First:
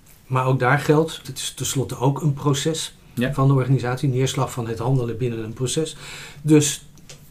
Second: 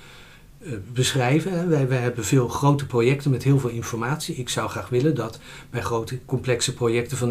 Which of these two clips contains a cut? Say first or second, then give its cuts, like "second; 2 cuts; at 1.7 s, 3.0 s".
first; 1 cut; at 1.2 s